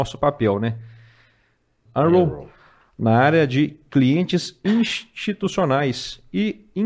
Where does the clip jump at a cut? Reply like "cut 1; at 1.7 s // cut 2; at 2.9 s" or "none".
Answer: cut 1; at 1.9 s